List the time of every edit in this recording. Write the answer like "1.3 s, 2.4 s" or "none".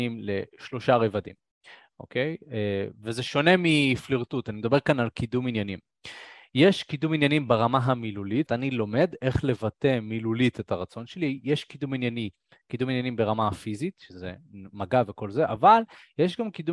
8.5 s